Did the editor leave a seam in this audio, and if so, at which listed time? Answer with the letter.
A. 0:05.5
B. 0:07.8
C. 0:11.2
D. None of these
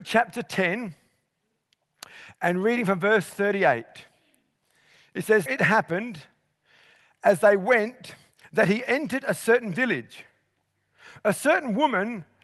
A